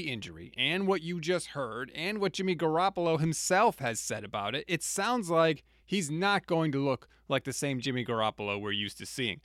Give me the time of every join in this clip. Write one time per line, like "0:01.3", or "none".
none